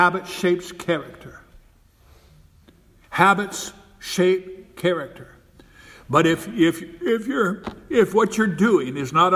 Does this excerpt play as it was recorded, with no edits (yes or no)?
yes